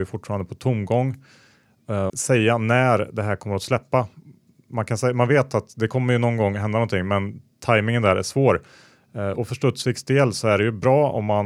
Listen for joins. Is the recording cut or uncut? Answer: cut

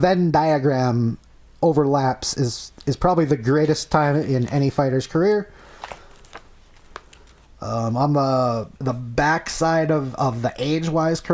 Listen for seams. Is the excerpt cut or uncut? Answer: cut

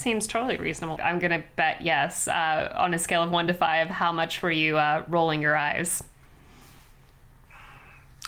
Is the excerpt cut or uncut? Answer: cut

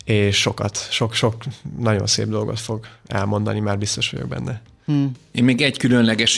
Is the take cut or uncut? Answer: uncut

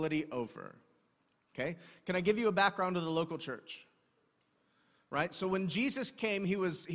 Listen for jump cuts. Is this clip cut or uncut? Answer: uncut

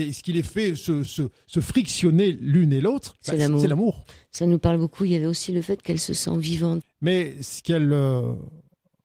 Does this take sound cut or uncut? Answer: cut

